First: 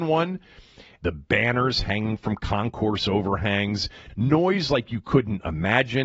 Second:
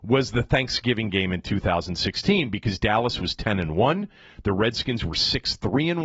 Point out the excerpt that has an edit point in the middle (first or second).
first